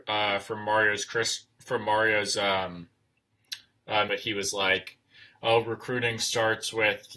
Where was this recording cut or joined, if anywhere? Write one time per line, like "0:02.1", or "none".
0:04.1